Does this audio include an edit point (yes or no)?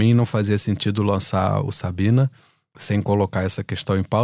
yes